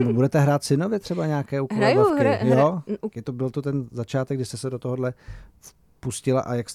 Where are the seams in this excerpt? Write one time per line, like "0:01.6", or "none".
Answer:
0:03.1